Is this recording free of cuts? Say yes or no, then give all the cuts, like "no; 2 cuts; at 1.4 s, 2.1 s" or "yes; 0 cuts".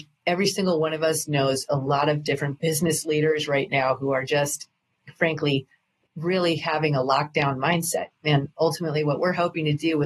yes; 0 cuts